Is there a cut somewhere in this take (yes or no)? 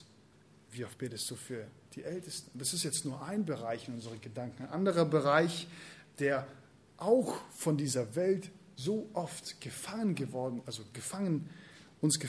no